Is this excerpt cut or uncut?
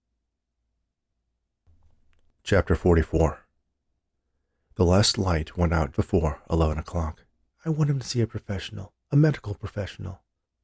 cut